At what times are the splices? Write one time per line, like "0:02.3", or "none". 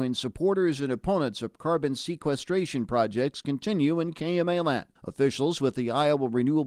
0:05.0

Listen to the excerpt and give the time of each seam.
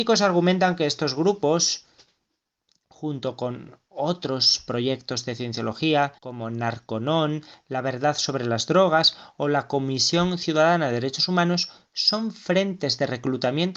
0:06.2

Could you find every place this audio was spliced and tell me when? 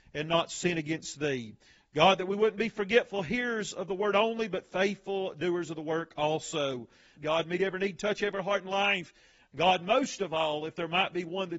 0:07.2

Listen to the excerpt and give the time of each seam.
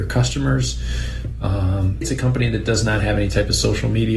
0:02.0

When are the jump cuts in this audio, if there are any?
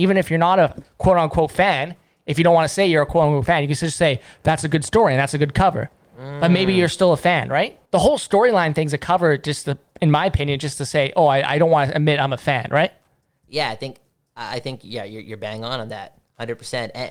0:07.8

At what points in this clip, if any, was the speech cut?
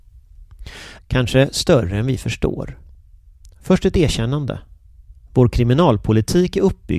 0:01.0

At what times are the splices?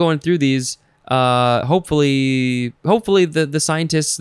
none

